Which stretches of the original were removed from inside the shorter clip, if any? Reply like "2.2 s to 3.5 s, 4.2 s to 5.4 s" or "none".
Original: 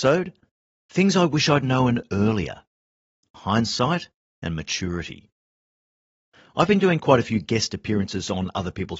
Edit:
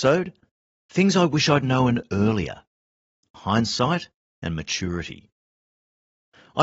none